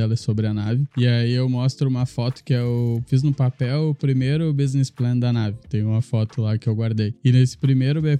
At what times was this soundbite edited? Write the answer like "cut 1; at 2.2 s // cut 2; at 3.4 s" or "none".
none